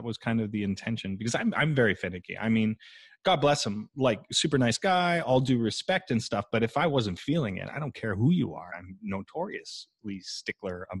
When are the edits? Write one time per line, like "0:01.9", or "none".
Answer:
0:08.7